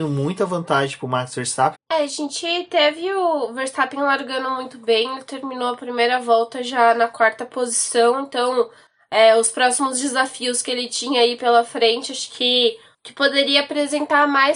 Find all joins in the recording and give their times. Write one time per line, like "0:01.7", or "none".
0:01.7